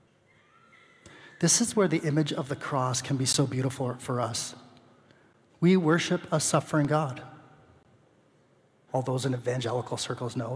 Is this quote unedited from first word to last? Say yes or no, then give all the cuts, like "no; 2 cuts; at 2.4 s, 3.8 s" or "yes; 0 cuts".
no; 2 cuts; at 5.5 s, 8.9 s